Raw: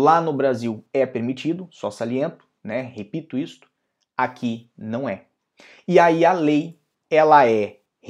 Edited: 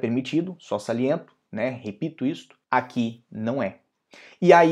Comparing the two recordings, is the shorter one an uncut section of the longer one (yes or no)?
no